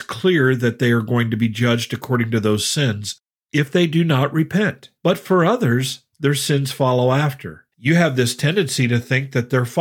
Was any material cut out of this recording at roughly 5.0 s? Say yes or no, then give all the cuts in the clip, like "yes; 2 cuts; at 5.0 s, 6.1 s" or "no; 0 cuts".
yes; 2 cuts; at 5.0 s, 7.7 s